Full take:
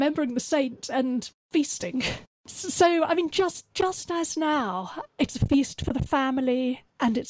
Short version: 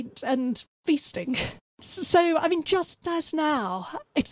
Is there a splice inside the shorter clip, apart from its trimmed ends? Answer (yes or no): yes